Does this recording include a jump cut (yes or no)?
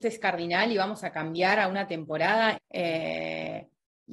yes